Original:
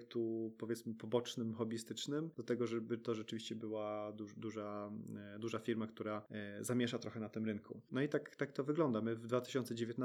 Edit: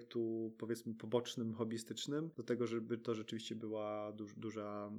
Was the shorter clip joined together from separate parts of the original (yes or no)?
no